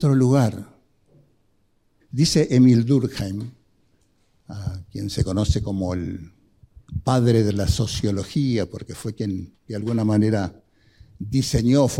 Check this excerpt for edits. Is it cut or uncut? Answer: cut